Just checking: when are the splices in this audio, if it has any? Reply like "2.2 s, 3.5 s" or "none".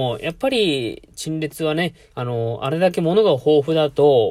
2.1 s

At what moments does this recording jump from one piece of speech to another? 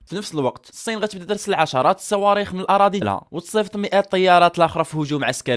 3.0 s

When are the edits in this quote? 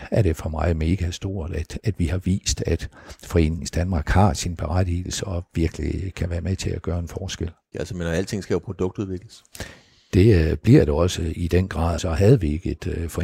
7.7 s, 12.0 s

